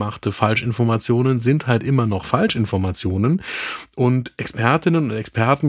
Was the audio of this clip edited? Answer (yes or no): no